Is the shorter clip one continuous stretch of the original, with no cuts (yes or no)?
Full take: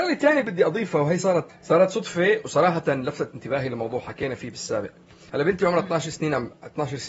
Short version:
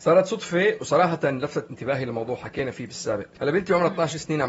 no